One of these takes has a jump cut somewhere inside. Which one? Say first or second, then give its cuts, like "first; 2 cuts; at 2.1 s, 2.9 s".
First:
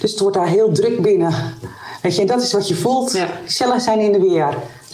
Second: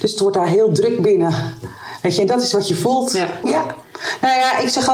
second; 1 cut; at 3.4 s